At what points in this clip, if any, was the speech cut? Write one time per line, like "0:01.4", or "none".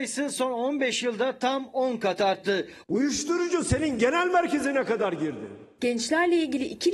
0:02.8